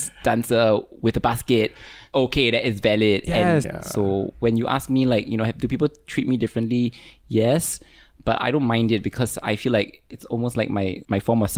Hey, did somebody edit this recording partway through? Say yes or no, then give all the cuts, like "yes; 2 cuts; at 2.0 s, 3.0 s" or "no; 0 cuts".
yes; 1 cut; at 3.6 s